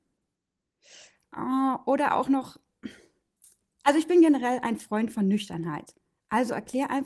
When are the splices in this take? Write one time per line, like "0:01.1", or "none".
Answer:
none